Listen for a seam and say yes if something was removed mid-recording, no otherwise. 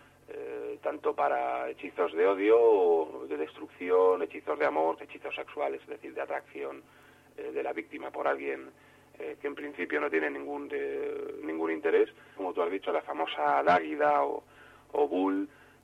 yes